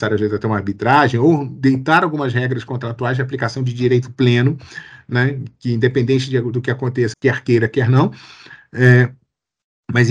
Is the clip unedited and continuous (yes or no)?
no